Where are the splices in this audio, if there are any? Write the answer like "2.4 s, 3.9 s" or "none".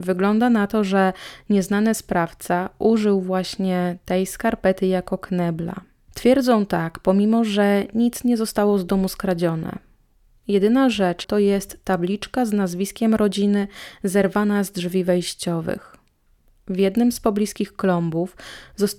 6.1 s, 11.2 s